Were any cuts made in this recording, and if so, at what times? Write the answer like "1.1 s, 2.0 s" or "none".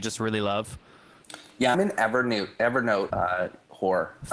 1.7 s, 3.1 s